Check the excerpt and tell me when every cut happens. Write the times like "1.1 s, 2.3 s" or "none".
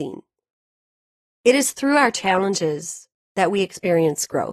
none